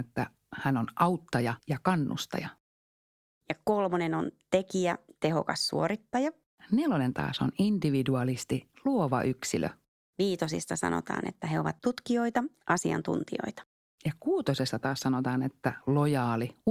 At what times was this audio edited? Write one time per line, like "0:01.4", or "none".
0:01.6